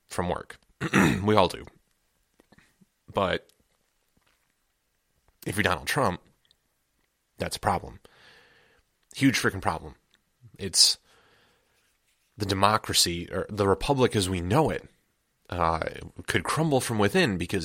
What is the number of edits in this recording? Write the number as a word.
zero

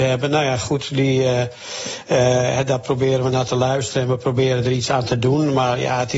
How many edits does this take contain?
zero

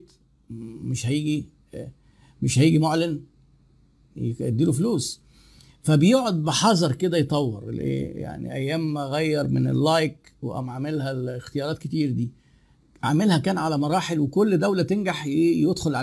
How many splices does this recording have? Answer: zero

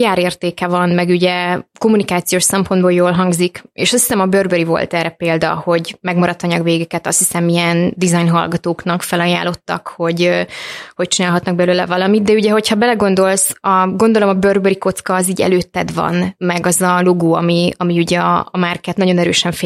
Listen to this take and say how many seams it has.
zero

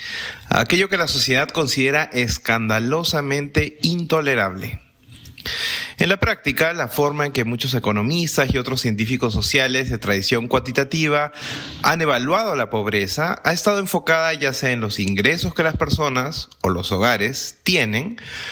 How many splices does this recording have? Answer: zero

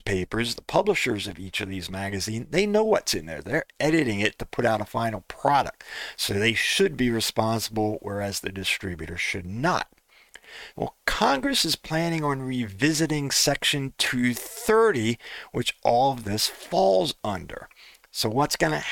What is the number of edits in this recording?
one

